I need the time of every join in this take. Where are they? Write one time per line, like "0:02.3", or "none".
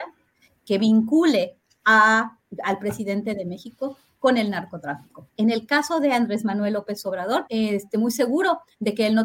0:05.3
0:07.5